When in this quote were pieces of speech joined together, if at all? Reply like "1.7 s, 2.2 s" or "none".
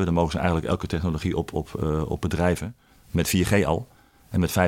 3.0 s